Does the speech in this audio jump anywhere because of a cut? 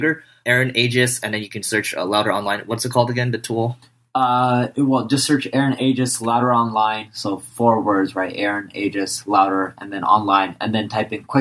no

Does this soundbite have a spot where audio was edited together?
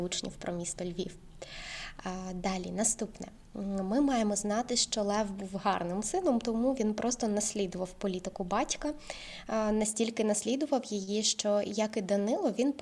no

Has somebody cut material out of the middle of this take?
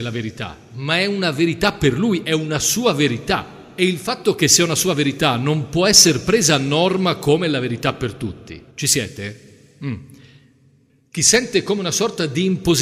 yes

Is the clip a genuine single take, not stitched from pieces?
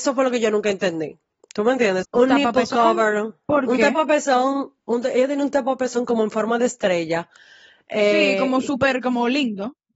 no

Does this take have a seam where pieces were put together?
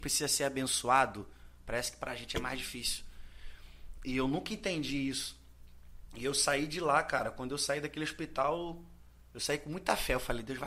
no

